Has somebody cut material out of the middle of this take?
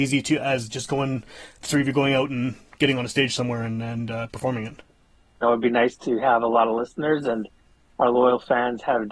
yes; 1 cut; at 5.4 s

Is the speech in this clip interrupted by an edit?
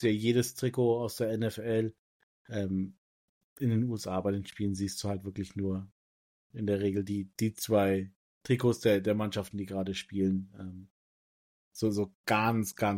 no; 0 cuts

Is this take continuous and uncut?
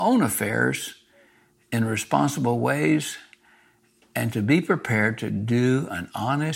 yes; 0 cuts

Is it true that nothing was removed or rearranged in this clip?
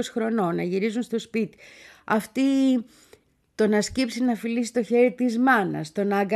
yes; 0 cuts

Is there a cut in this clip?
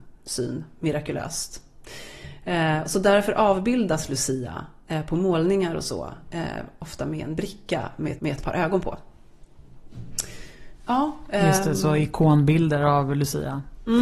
yes; 1 cut; at 8.2 s

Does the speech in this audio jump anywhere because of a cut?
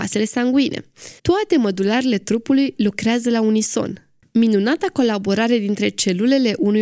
yes; 2 cuts; at 1.2 s, 4.2 s

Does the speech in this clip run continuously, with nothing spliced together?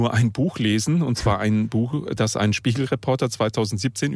yes; 0 cuts

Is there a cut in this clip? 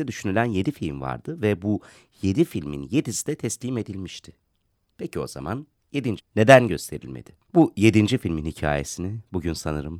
yes; 2 cuts; at 6.2 s, 7.4 s

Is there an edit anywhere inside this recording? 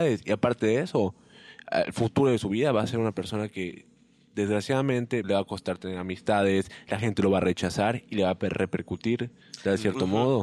yes; 1 cut; at 5.2 s

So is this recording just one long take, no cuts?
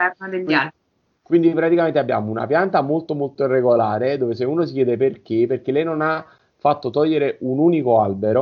yes; 0 cuts

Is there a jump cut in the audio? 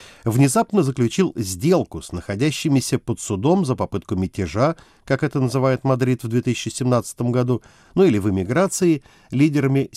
no; 0 cuts

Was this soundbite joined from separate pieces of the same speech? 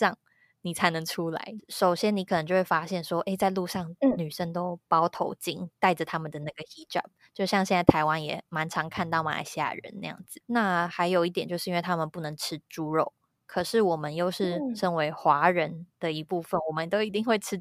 yes; 1 cut; at 1.6 s

